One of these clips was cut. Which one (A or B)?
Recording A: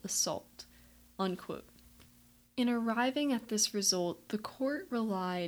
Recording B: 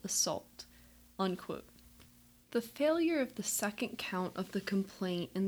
B